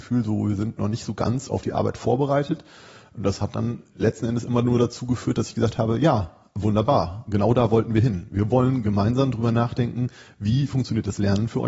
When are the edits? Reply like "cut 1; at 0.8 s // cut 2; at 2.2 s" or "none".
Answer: none